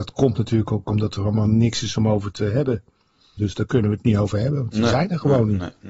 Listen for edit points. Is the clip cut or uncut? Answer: cut